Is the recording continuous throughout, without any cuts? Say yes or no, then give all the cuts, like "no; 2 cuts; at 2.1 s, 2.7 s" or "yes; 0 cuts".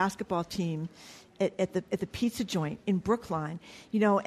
yes; 0 cuts